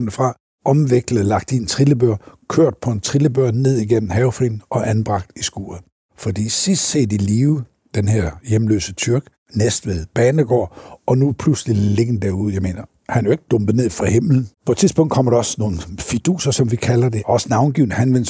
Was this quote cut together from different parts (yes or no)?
yes